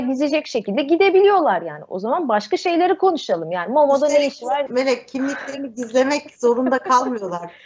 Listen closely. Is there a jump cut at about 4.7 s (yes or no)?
yes